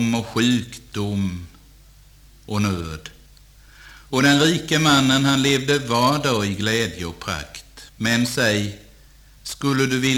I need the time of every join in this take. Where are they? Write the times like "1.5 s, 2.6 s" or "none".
7.9 s